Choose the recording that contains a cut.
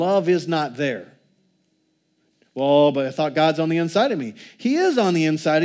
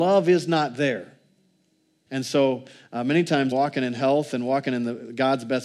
second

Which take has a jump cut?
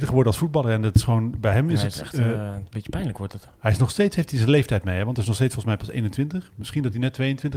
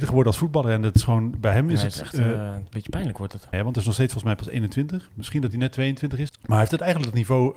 second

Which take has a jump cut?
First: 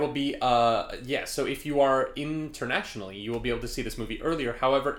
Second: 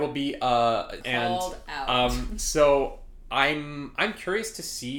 second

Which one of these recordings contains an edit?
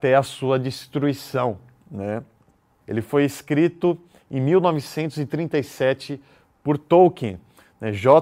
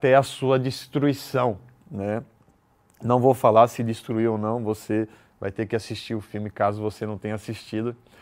first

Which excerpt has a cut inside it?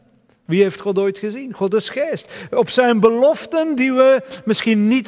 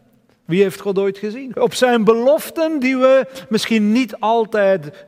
second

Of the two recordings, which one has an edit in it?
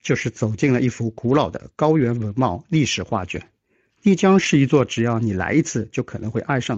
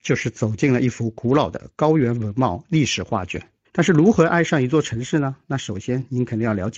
second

